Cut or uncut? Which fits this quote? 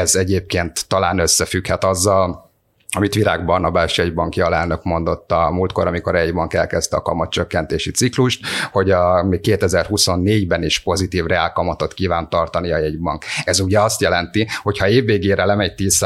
uncut